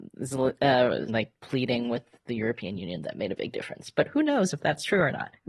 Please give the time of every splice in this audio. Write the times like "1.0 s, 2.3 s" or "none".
1.1 s